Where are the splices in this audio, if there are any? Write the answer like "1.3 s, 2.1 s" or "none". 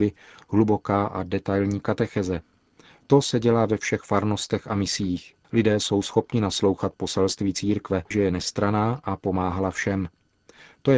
5.4 s, 8.1 s